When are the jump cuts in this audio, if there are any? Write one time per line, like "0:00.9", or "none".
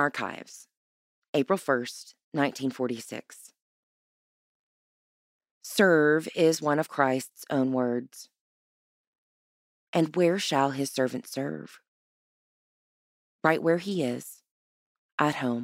none

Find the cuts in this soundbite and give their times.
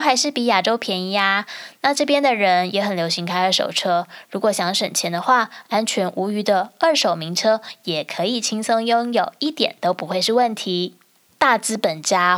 0:11.3

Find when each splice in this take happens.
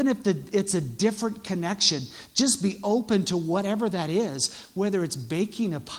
none

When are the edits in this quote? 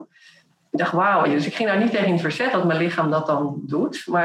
0:01.3

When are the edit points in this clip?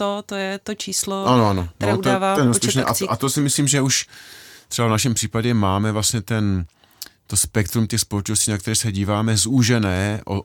none

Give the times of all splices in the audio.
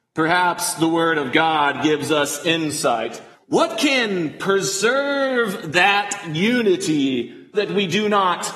0:03.3
0:07.5

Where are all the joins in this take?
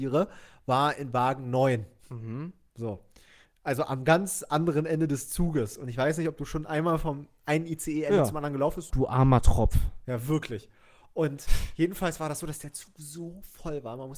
0:08.9

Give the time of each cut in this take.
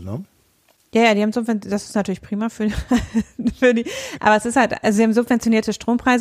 none

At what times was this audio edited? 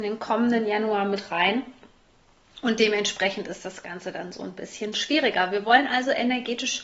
none

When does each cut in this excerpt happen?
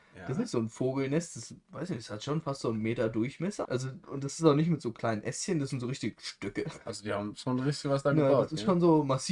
0:03.6

